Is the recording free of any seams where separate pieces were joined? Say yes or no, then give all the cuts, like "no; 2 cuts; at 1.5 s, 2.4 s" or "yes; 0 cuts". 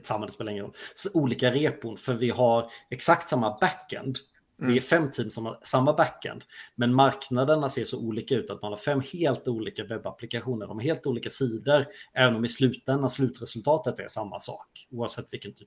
yes; 0 cuts